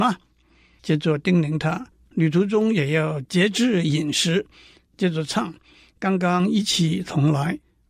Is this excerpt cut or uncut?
cut